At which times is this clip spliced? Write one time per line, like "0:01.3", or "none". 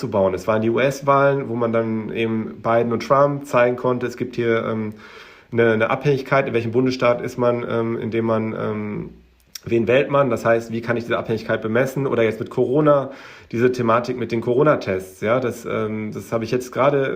none